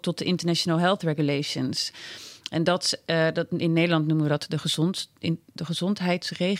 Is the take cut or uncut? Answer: uncut